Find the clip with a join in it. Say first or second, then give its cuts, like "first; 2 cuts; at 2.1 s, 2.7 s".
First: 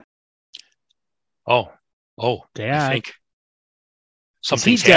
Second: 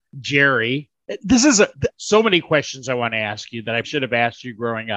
second; 2 cuts; at 1.9 s, 3.8 s